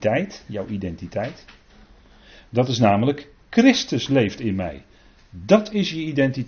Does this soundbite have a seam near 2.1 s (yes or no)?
no